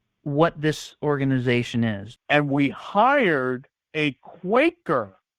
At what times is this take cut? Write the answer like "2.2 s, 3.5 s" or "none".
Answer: 2.2 s